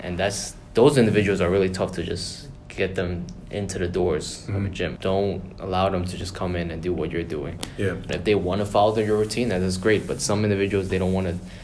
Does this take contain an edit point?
yes; 2 cuts; at 5.0 s, 8.1 s

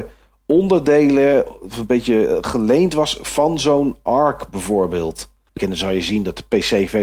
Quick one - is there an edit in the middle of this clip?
yes; 1 cut; at 5.6 s

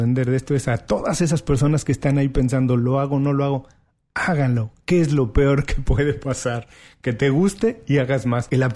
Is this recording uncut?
yes; 0 cuts

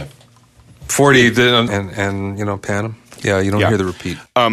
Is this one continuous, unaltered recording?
no; 2 cuts; at 1.7 s, 3.2 s

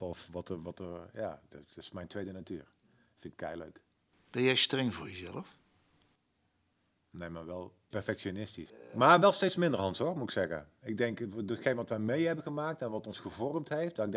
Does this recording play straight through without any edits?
yes; 0 cuts

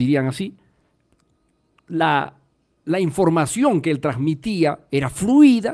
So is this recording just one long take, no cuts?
yes; 0 cuts

